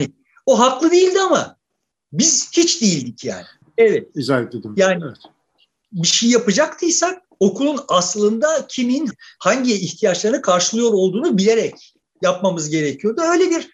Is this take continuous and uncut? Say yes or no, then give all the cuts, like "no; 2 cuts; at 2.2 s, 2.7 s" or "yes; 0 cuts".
no; 1 cut; at 3.6 s